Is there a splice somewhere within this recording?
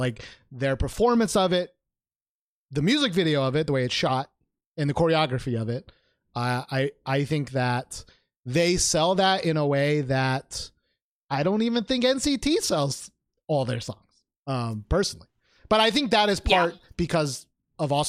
no; 0 cuts

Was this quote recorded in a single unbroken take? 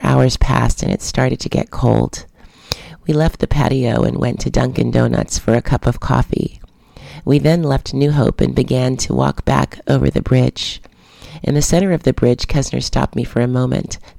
yes; 0 cuts

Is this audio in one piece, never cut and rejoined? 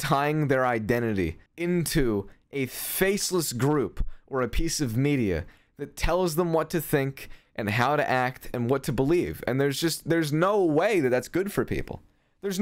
no; 1 cut; at 1.5 s

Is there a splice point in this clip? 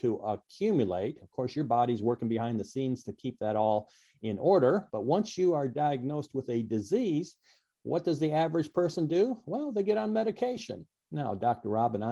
yes; 1 cut; at 4.9 s

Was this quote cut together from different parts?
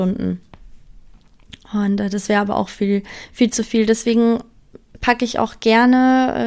no; 0 cuts

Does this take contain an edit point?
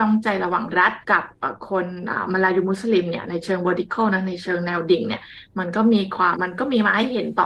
yes; 2 cuts; at 1.0 s, 6.3 s

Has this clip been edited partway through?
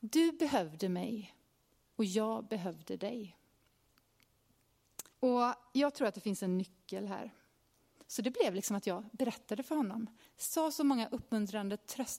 yes; 3 cuts; at 5.1 s, 8.0 s, 10.2 s

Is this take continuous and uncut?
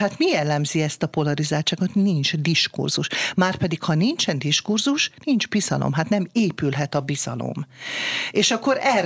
yes; 0 cuts

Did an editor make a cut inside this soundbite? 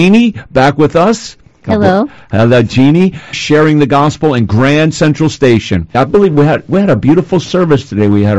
yes; 2 cuts; at 3.3 s, 5.9 s

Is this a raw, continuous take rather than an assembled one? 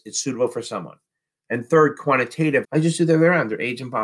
no; 2 cuts; at 1.5 s, 2.6 s

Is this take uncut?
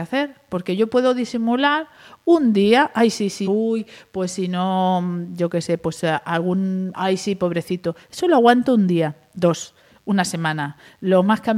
no; 2 cuts; at 3.4 s, 6.9 s

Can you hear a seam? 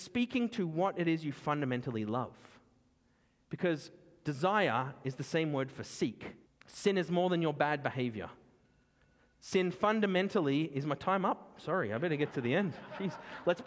yes; 1 cut; at 6.5 s

